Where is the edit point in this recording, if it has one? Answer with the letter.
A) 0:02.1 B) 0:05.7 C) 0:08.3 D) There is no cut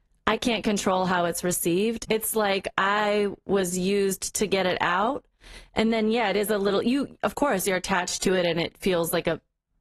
A